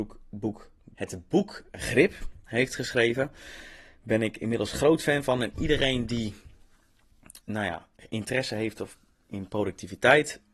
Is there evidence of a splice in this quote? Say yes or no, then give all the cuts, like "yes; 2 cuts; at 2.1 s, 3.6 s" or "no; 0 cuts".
yes; 2 cuts; at 0.9 s, 7.4 s